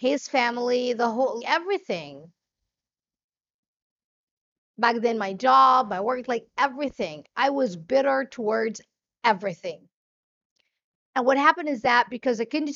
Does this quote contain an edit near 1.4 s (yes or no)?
yes